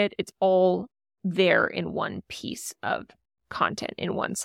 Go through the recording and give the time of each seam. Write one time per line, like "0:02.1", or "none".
none